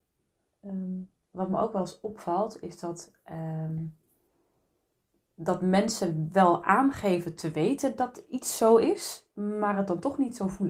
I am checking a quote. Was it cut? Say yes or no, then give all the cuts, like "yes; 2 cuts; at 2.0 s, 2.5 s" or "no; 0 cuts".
no; 0 cuts